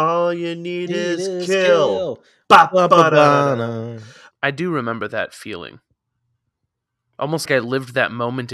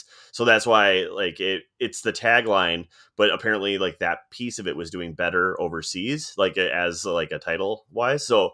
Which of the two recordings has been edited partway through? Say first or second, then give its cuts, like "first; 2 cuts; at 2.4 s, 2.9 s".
first; 2 cuts; at 4.3 s, 7.5 s